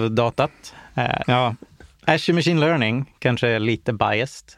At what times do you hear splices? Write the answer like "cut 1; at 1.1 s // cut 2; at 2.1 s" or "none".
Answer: cut 1; at 1.2 s // cut 2; at 3.2 s